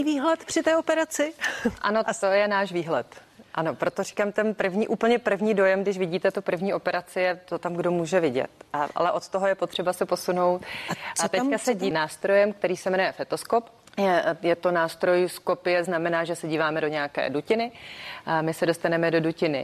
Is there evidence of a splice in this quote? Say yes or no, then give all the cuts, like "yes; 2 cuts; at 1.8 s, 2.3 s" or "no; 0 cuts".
yes; 2 cuts; at 11.9 s, 13.9 s